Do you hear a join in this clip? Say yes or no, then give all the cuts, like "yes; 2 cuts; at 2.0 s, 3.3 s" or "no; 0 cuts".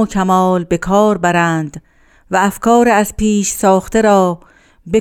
no; 0 cuts